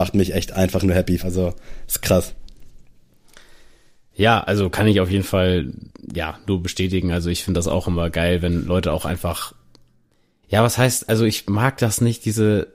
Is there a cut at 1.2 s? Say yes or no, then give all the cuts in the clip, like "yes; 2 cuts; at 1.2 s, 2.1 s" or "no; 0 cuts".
yes; 1 cut; at 1.2 s